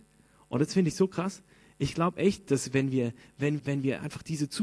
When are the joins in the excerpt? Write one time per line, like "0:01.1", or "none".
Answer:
0:03.6